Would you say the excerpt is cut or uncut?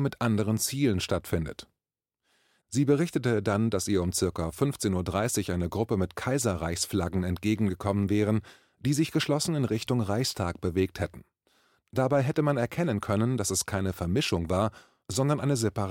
uncut